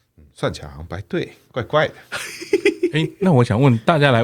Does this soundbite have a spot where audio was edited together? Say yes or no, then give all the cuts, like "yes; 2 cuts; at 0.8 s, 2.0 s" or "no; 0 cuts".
no; 0 cuts